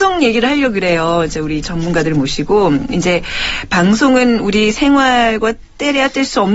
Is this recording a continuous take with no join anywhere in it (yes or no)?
yes